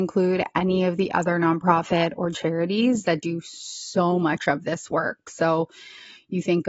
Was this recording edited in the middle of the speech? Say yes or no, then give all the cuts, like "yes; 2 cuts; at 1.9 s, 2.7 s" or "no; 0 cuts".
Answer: no; 0 cuts